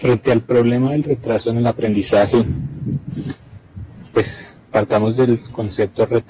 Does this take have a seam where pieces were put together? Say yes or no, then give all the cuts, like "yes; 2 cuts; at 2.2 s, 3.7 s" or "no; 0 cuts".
no; 0 cuts